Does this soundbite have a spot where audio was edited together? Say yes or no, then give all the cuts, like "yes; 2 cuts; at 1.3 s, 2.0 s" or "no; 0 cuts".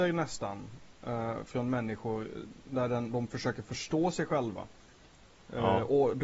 no; 0 cuts